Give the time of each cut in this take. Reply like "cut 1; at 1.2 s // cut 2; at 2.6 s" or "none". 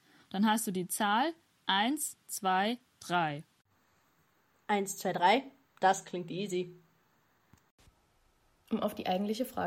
none